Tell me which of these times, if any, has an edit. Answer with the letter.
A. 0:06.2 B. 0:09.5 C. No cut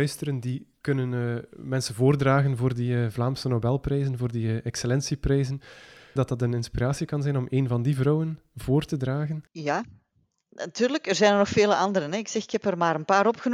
A